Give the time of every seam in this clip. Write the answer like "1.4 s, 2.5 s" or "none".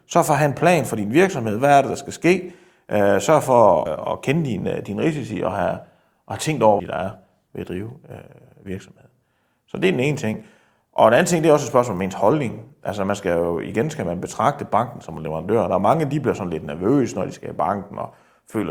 3.9 s, 6.8 s